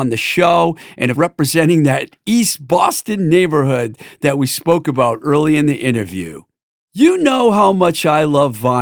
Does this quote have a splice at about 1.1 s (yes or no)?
yes